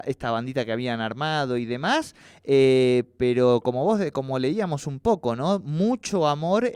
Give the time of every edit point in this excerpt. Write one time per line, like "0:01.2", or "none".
none